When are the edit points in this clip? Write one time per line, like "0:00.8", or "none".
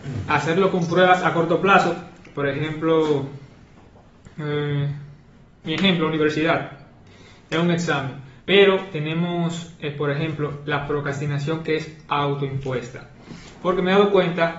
0:05.6
0:08.4